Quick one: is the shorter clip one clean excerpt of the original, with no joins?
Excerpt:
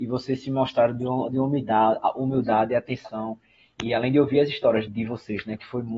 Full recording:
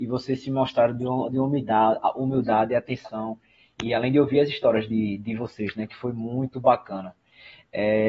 no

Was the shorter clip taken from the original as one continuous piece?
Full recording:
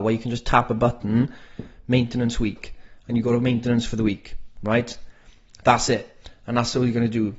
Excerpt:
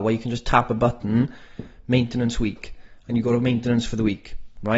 yes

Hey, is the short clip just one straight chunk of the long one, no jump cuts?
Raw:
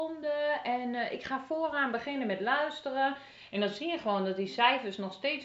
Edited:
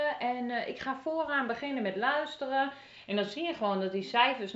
yes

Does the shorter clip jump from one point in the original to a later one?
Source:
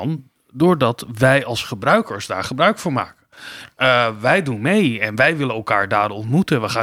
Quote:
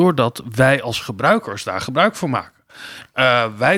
no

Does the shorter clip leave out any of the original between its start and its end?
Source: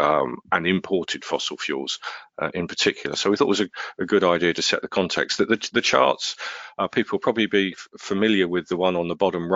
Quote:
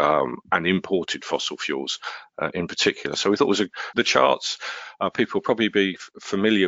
yes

